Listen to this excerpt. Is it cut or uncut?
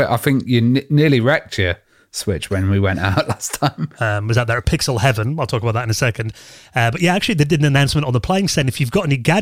cut